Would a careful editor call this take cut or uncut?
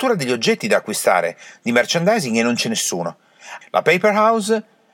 cut